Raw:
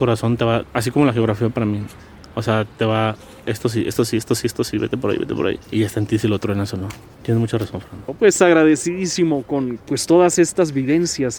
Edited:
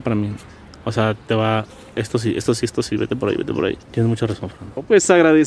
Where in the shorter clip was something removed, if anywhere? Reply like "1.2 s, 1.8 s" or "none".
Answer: 2.6 s, 3.8 s

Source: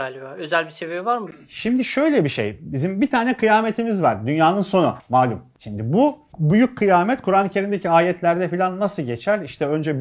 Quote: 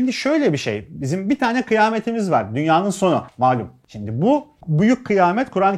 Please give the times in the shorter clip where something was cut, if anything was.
none

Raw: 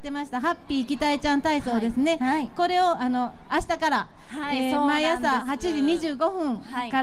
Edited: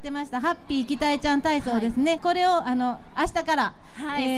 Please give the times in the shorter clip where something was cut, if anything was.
2.2 s

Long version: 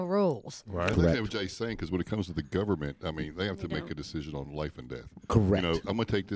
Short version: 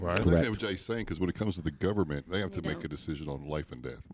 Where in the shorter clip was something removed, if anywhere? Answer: 2.3 s

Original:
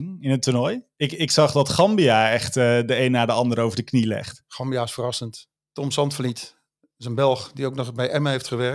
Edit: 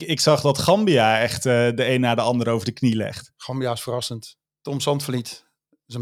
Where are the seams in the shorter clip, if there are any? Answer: none

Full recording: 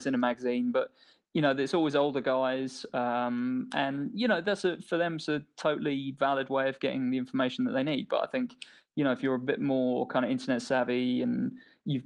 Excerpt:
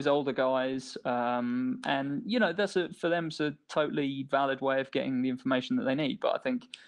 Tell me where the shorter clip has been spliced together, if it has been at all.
none

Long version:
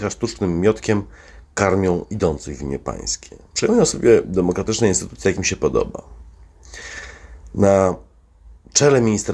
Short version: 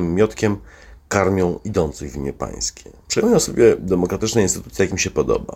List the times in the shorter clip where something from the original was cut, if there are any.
none

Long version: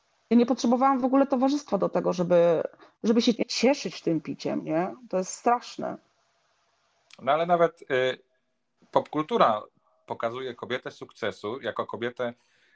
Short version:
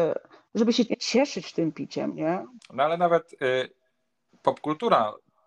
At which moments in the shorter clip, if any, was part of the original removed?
2.6 s

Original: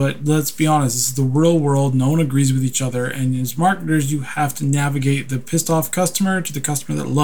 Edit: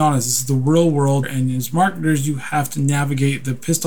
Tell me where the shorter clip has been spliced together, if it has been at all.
1.2 s

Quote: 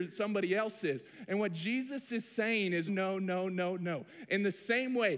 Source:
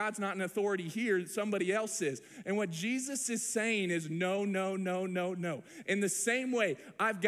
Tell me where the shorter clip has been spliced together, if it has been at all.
2.9 s

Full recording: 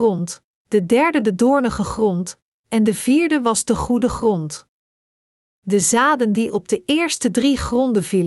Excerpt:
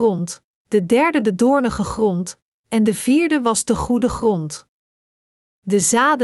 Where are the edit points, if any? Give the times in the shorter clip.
none

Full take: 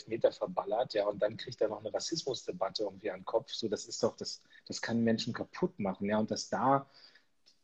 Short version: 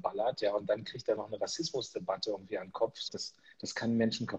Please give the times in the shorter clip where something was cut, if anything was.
3.1 s

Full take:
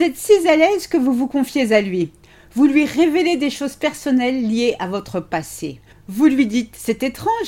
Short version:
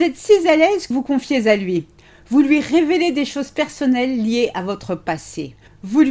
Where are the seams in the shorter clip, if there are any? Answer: 0.9 s

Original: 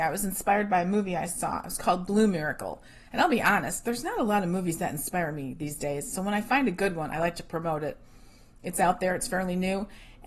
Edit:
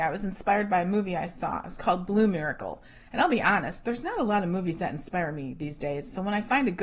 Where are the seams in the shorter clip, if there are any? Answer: none

